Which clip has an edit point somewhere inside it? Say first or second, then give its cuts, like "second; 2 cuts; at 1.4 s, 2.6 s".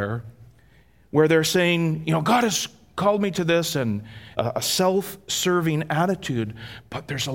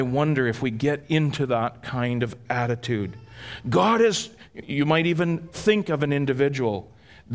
first; 1 cut; at 4.3 s